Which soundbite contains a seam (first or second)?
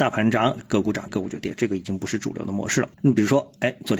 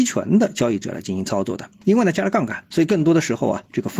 first